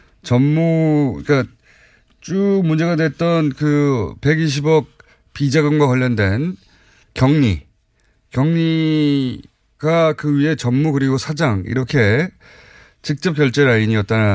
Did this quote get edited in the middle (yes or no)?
no